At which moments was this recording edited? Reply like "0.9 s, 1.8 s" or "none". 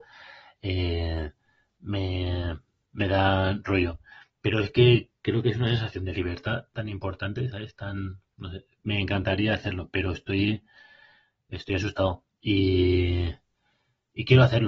8.3 s